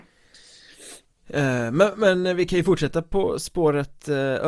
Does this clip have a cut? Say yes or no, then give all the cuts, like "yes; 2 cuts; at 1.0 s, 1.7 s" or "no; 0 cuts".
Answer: no; 0 cuts